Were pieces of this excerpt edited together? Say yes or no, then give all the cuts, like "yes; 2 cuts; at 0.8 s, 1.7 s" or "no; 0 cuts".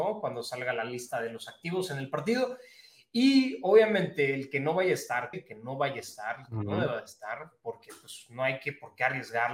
yes; 1 cut; at 5.3 s